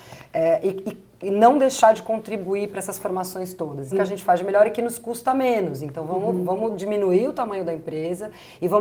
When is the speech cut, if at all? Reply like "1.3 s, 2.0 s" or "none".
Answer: 3.9 s